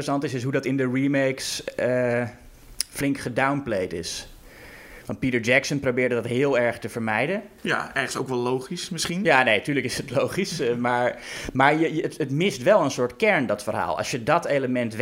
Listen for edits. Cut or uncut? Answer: uncut